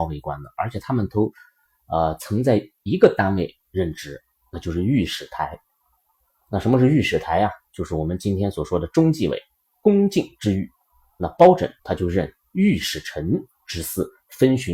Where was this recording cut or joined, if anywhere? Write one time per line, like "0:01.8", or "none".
0:09.7
0:11.8